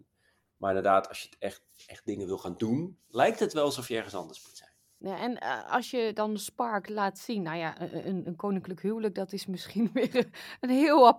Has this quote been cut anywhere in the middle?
no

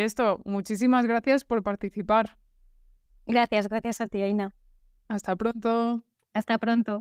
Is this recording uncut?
yes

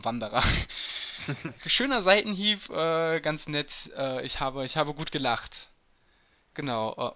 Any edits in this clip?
yes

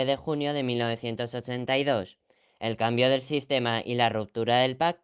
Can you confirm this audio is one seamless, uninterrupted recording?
yes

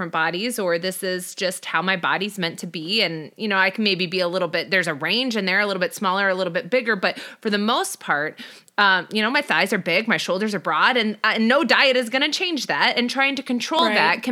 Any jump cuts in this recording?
no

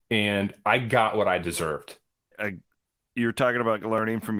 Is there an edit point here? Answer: yes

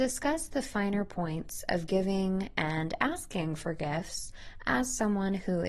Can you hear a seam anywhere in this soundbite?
no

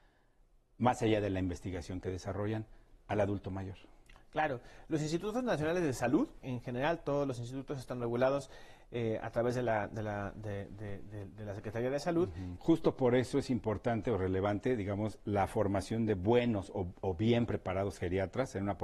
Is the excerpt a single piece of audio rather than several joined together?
no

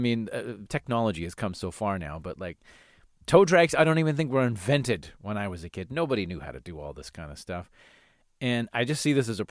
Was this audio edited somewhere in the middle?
no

